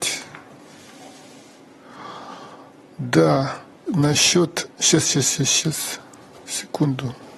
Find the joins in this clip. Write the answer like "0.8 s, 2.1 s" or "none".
3.9 s, 5.2 s